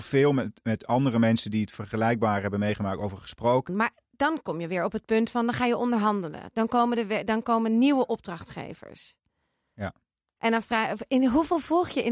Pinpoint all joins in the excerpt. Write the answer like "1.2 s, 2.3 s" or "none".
3.7 s